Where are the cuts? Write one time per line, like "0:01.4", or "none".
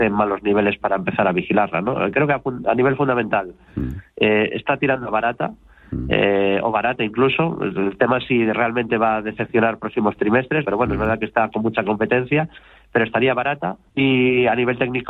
0:10.6
0:13.9